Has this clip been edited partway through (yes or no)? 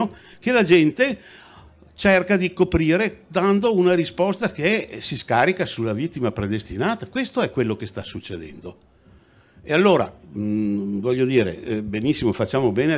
no